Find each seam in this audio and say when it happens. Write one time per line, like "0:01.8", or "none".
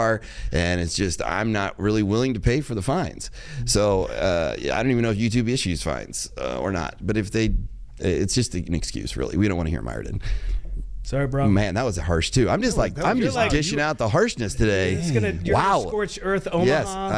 none